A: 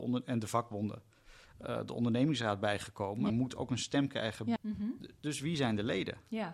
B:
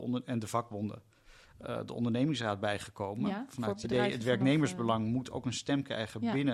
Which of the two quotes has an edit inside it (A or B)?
A